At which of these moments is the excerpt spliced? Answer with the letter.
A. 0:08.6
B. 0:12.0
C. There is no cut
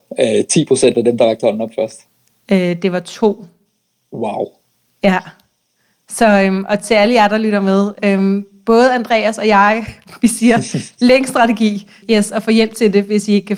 B